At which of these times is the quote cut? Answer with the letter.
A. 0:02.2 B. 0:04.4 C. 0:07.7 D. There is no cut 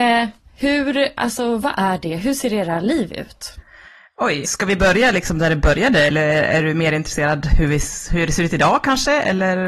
B